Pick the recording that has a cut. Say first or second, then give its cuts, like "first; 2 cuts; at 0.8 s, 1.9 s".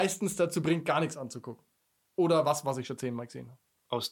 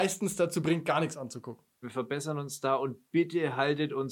second; 1 cut; at 1.8 s